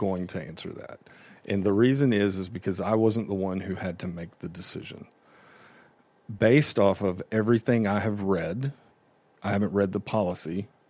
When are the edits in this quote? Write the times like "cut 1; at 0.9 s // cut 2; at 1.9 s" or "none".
none